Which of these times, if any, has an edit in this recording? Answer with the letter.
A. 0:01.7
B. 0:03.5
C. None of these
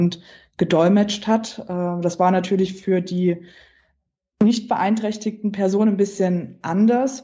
C